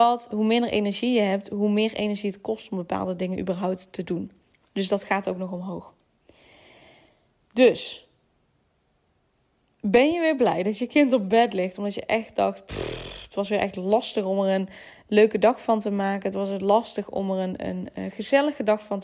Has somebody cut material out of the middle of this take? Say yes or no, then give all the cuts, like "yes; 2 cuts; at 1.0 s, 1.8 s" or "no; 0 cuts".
no; 0 cuts